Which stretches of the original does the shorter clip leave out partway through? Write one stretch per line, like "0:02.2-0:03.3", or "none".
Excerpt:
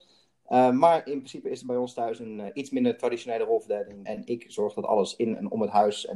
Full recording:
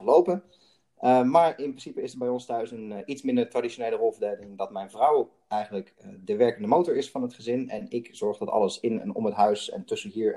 0:04.6-0:07.7